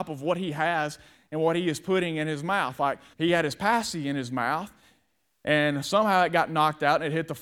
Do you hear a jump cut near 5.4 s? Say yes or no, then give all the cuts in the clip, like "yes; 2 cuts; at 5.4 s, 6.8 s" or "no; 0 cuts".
no; 1 cut; at 3.1 s